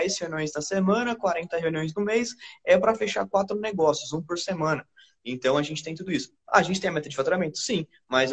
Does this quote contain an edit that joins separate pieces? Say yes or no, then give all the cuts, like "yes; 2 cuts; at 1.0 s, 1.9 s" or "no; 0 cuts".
no; 0 cuts